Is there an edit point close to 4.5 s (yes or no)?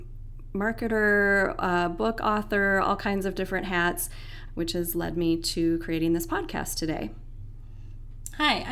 yes